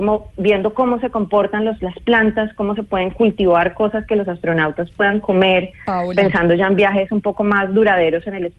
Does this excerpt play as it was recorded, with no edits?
yes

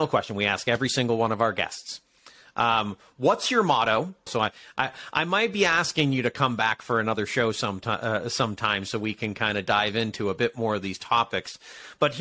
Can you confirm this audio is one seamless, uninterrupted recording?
no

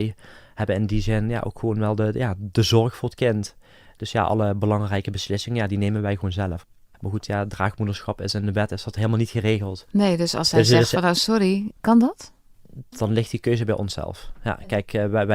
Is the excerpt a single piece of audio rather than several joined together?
no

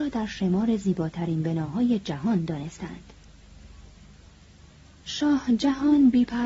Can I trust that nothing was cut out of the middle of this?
yes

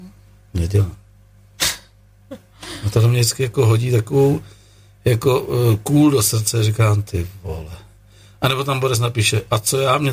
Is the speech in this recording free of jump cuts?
yes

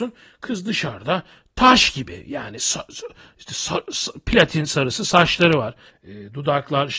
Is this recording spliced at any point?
yes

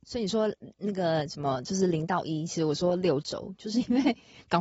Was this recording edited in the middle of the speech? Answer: no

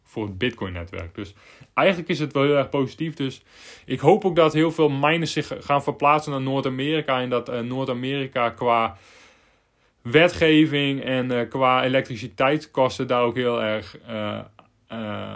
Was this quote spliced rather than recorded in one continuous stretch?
no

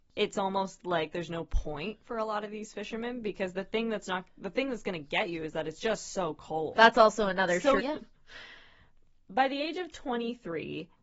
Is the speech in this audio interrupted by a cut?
yes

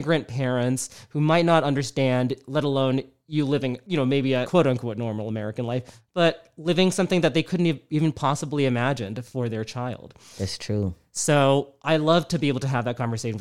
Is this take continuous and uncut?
yes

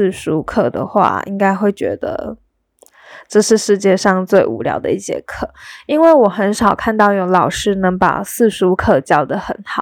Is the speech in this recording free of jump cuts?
yes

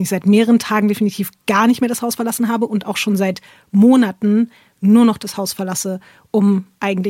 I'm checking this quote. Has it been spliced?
no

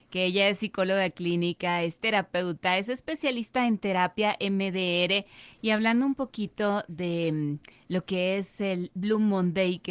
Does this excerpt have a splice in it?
no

